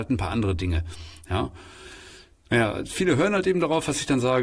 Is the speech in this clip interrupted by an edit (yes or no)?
no